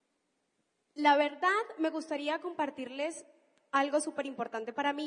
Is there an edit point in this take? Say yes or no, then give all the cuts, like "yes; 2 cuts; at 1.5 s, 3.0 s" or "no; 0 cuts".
no; 0 cuts